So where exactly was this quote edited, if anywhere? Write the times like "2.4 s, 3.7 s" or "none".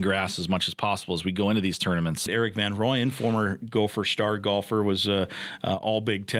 2.3 s